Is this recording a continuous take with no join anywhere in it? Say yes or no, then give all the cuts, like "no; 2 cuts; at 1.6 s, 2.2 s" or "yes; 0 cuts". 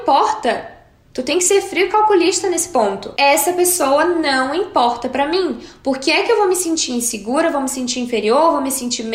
yes; 0 cuts